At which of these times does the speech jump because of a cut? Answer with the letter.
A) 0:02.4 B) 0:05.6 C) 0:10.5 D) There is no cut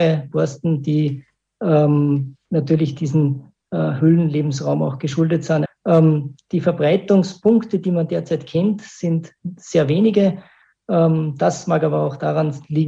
B